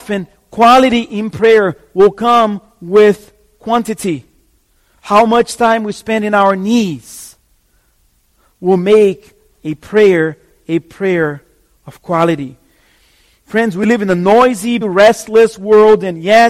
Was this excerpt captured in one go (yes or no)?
no